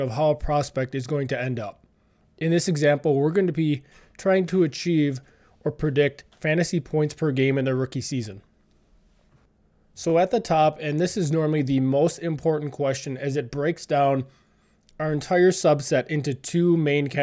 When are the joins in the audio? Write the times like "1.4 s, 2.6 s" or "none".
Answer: none